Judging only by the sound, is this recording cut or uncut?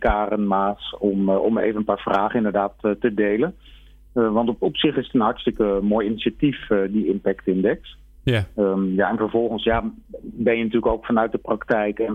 uncut